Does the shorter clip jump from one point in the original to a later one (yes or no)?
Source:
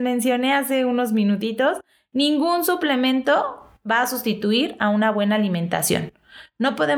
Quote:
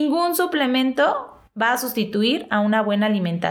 no